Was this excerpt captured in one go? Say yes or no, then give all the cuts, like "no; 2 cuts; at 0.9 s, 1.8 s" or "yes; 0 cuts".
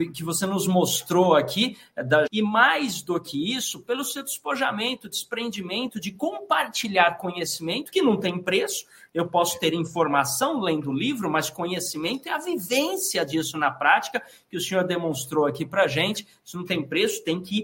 no; 1 cut; at 2.3 s